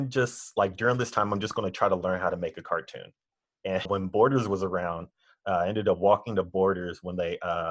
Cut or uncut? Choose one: cut